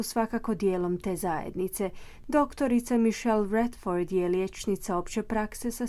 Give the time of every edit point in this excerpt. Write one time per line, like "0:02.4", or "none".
0:02.2